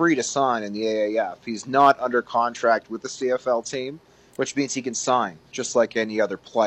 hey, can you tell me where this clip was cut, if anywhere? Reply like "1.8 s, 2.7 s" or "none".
none